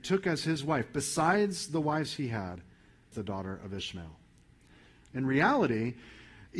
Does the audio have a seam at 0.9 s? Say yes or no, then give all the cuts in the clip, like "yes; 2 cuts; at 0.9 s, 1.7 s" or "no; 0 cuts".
no; 2 cuts; at 3.1 s, 5.1 s